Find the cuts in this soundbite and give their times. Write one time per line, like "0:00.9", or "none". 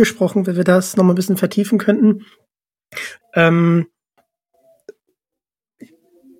0:03.2